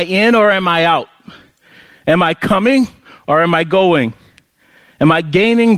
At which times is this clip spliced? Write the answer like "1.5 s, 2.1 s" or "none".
none